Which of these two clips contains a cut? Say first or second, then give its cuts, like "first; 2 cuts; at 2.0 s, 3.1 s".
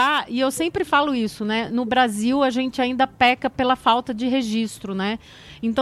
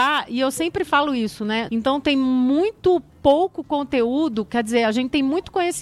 second; 1 cut; at 1.7 s